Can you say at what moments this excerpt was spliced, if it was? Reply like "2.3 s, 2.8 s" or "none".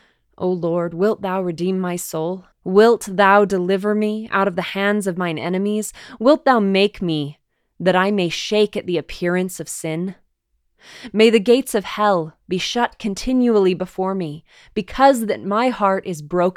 2.5 s